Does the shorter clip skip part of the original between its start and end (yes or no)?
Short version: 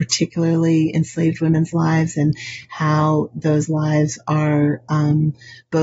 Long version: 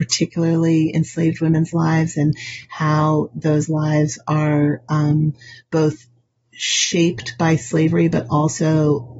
no